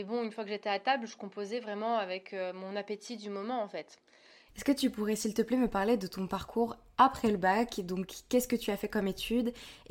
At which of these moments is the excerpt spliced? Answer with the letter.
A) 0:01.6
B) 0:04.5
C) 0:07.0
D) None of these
B